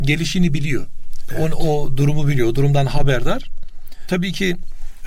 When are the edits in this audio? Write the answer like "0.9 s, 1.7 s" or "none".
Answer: none